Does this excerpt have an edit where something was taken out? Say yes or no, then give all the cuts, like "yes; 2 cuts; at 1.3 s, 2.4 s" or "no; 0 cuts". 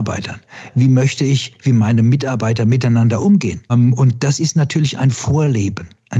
yes; 1 cut; at 3.7 s